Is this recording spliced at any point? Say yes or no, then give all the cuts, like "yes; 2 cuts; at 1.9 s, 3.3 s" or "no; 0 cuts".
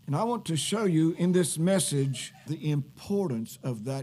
yes; 1 cut; at 2.5 s